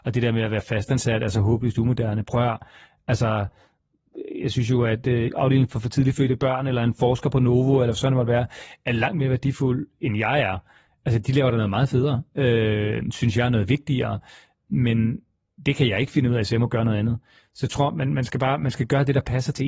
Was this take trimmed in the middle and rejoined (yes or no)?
yes